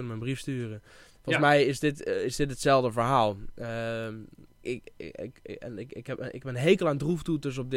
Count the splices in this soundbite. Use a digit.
1